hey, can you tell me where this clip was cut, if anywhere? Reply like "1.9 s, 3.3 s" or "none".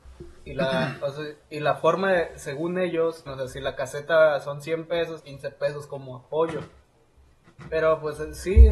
3.3 s, 5.2 s